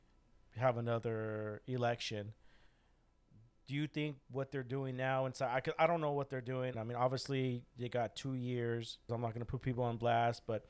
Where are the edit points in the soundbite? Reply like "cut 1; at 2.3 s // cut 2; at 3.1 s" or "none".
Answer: cut 1; at 6.7 s // cut 2; at 9.1 s